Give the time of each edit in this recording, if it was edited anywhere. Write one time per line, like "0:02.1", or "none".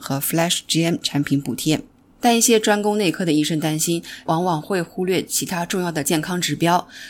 0:04.3